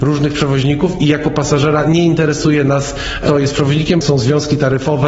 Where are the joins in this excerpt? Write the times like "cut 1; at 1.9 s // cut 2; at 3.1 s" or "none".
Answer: cut 1; at 4.0 s